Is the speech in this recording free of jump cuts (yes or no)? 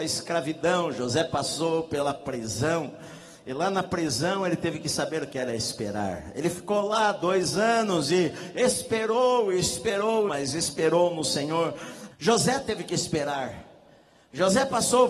no